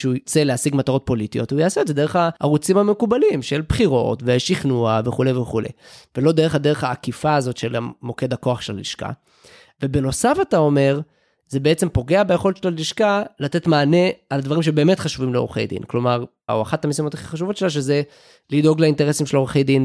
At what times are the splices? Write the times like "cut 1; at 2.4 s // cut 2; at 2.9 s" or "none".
cut 1; at 16.5 s